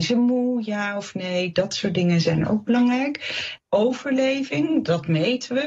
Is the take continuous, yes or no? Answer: no